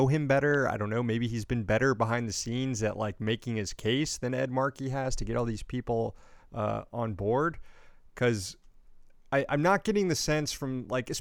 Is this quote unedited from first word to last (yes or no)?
yes